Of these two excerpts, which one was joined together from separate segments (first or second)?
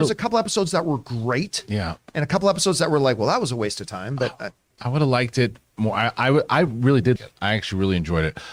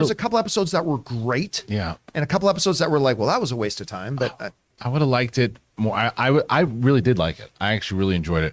first